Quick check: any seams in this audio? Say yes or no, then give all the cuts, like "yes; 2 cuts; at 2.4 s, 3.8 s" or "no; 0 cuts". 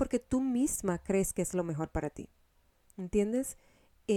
no; 0 cuts